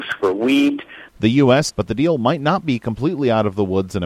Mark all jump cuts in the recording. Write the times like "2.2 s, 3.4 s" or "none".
1.7 s